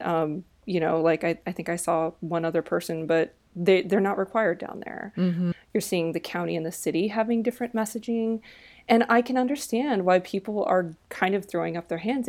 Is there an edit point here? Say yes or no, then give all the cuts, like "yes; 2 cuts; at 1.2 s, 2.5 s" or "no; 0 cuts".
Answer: yes; 1 cut; at 5.5 s